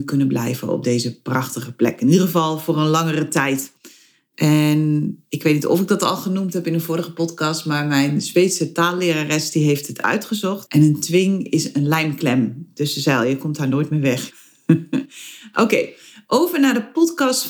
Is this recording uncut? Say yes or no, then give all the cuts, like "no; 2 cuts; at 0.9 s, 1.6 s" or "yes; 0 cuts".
no; 2 cuts; at 10.6 s, 14.3 s